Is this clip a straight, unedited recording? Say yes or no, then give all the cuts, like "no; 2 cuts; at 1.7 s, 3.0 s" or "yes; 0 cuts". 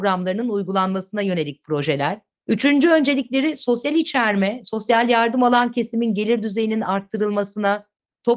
yes; 0 cuts